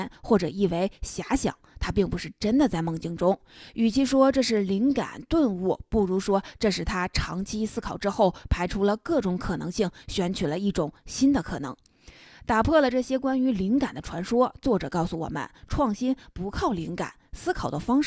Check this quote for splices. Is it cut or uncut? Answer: uncut